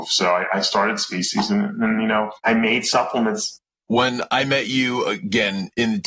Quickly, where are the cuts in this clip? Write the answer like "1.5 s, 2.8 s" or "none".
2.4 s